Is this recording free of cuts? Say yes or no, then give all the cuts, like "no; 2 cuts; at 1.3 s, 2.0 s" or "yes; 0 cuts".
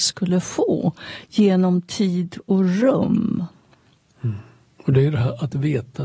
yes; 0 cuts